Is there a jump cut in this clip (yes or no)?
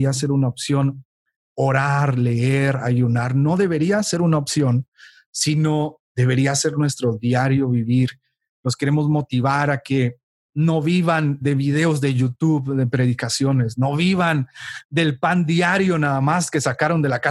no